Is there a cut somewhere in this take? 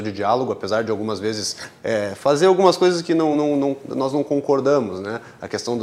no; 0 cuts

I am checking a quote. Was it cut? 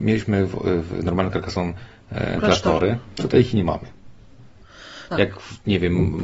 yes; 1 cut; at 5.1 s

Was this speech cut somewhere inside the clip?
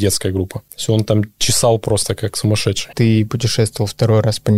yes; 1 cut; at 2.9 s

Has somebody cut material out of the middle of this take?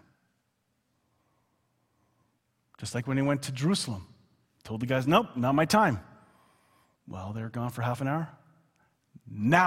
no; 0 cuts

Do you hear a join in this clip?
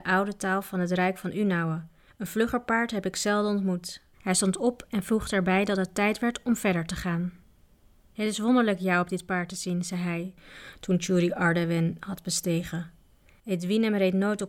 yes; 1 cut; at 4.1 s

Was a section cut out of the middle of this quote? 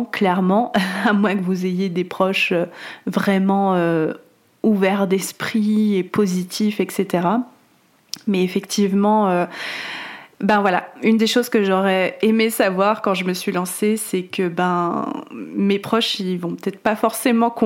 no; 0 cuts

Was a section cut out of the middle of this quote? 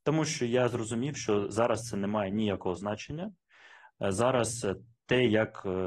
no; 0 cuts

